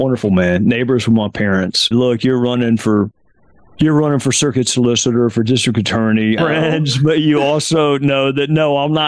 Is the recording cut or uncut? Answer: cut